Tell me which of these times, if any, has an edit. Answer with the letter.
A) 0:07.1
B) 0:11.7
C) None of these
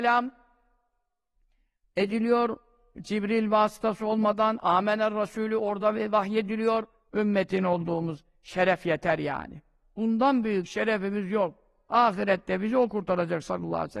A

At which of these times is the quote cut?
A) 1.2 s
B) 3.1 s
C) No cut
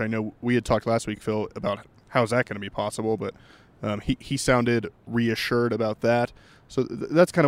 C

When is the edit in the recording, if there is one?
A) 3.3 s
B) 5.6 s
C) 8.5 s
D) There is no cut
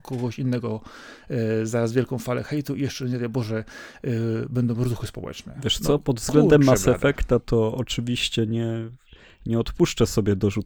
D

